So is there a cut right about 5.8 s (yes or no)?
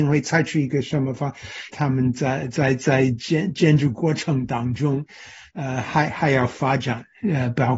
no